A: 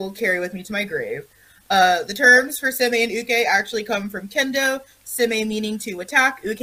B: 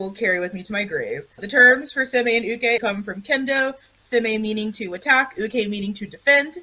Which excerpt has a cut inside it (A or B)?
B